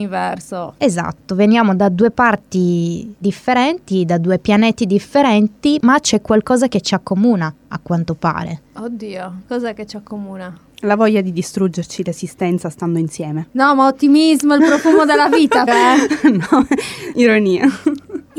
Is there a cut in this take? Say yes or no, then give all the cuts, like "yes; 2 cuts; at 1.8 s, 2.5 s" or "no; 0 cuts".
yes; 2 cuts; at 15.7 s, 17.1 s